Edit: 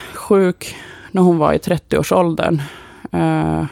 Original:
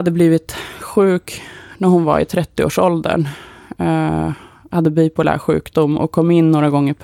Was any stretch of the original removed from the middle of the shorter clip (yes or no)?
no